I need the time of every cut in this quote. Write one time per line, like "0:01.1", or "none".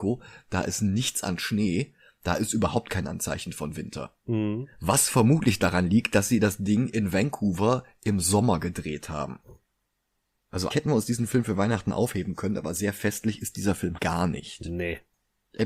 0:10.7
0:14.0